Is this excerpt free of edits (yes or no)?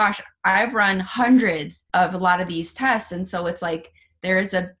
no